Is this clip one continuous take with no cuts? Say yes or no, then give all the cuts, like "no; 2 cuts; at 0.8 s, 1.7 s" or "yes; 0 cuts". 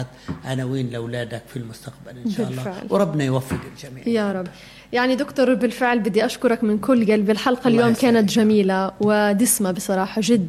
yes; 0 cuts